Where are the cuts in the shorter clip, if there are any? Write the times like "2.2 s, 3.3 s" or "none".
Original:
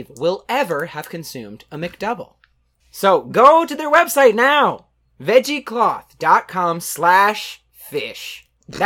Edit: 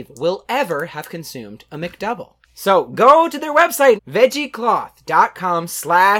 2.4 s, 4.0 s